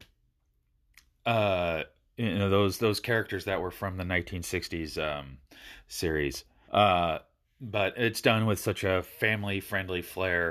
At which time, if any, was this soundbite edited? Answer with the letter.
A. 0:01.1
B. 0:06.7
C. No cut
B